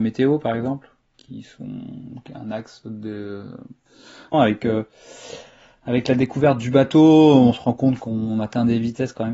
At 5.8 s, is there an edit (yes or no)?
no